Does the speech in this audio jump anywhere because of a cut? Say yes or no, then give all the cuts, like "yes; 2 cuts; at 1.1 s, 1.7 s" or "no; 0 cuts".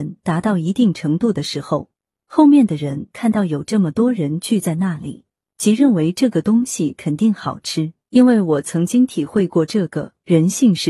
yes; 2 cuts; at 5.4 s, 8.1 s